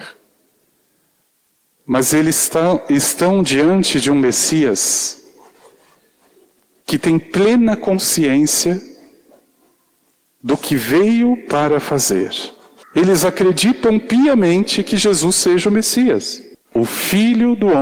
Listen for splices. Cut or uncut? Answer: cut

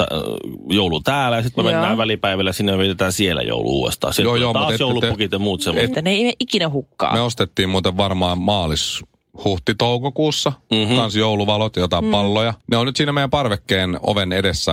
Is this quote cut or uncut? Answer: cut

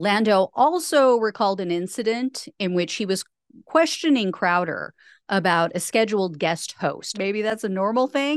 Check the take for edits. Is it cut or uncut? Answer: cut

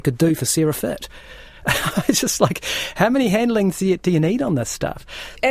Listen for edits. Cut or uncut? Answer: uncut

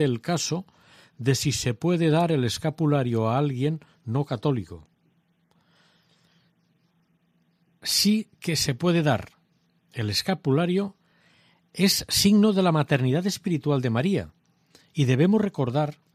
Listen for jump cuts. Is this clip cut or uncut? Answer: uncut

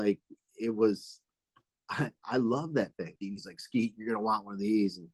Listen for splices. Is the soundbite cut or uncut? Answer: cut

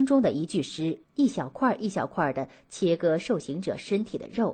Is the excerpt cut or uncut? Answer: cut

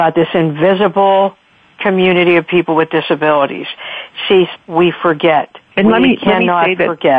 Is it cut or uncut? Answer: cut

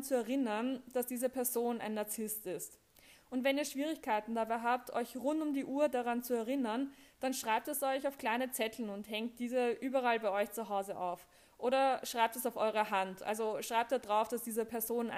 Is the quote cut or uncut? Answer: uncut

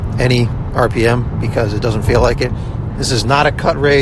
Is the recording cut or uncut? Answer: cut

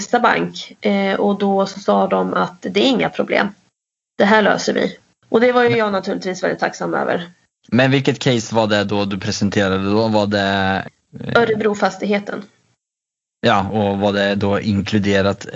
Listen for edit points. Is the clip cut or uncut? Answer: cut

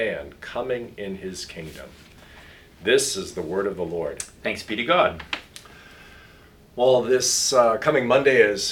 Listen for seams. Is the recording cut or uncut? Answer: uncut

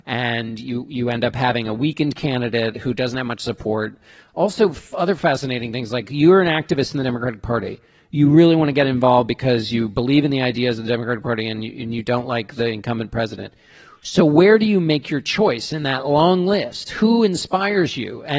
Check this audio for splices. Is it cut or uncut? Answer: uncut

